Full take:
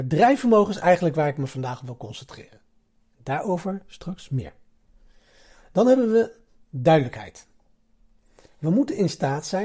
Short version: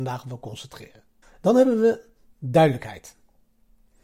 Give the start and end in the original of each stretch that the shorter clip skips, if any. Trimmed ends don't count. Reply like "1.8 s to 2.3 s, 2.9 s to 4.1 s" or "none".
2.8 s to 5.5 s